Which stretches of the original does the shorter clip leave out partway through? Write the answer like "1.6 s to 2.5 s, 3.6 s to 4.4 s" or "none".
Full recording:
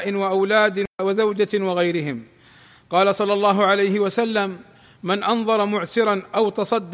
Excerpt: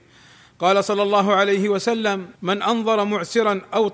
4.7 s to 5.0 s